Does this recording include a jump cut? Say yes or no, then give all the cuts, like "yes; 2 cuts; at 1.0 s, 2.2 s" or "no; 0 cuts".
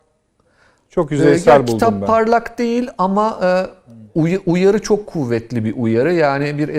no; 0 cuts